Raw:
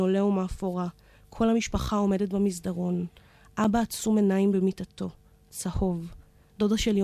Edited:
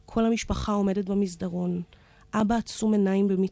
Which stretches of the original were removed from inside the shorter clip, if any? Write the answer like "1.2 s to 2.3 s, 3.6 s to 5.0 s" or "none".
none